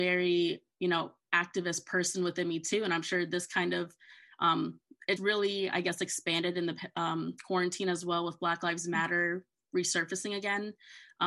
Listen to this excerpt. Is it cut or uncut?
cut